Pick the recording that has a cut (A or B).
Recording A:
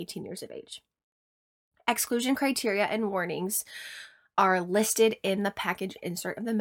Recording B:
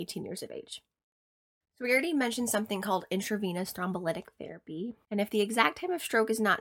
B